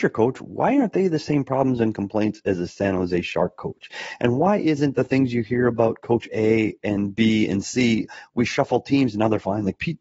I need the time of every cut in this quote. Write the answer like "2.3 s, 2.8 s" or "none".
none